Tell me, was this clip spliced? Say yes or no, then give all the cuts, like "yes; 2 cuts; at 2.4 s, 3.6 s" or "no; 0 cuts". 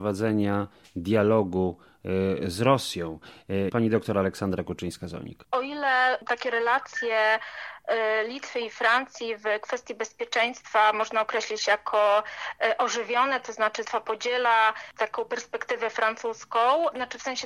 yes; 1 cut; at 3.7 s